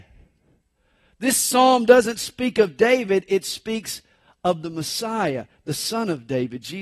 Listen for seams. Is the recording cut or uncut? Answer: uncut